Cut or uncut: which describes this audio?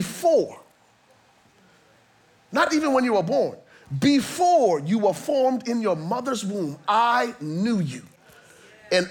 uncut